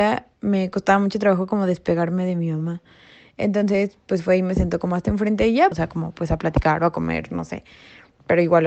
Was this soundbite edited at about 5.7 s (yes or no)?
yes